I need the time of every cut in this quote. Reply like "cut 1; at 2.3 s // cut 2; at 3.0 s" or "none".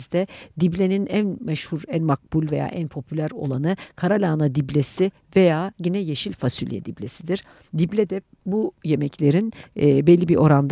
none